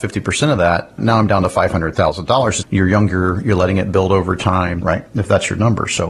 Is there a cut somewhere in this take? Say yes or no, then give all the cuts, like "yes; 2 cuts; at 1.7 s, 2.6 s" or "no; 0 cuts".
yes; 2 cuts; at 2.6 s, 4.8 s